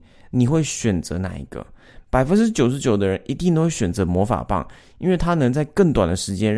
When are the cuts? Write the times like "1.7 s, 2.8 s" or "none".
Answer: none